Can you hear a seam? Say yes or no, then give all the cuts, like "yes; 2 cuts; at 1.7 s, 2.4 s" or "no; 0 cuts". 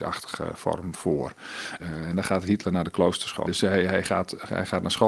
yes; 2 cuts; at 1.8 s, 3.4 s